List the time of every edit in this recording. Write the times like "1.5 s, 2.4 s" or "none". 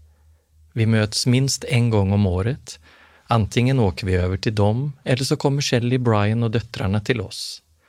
none